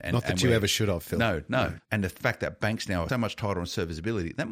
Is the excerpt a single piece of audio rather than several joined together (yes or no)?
no